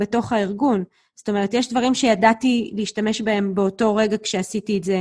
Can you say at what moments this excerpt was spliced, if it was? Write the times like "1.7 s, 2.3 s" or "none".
none